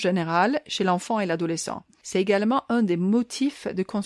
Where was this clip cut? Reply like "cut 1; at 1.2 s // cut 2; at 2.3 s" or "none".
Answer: none